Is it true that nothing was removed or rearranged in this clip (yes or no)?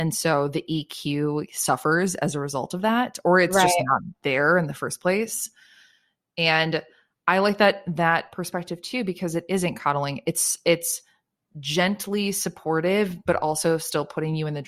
yes